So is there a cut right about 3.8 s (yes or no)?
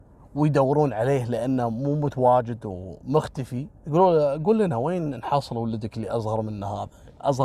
yes